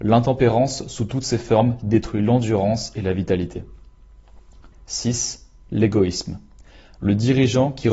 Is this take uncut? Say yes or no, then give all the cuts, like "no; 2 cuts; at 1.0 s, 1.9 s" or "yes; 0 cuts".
no; 1 cut; at 4.7 s